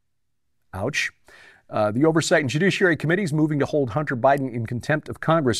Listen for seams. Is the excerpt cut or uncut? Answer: uncut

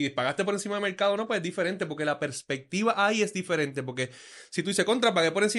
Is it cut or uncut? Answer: uncut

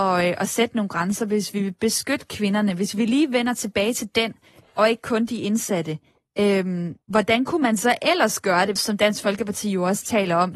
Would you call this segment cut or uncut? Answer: cut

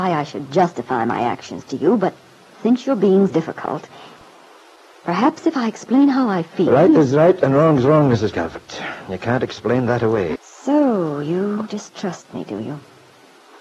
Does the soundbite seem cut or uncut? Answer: cut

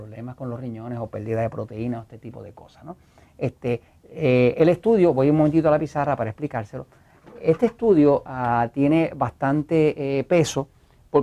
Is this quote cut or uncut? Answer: uncut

